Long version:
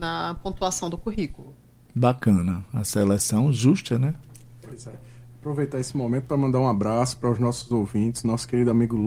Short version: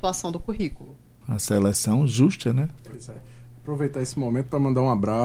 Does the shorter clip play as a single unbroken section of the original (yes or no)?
no